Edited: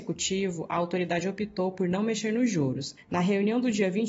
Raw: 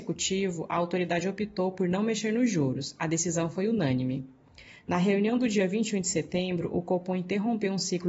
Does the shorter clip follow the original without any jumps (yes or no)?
no